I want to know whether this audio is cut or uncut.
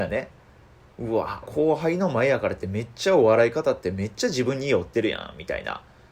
cut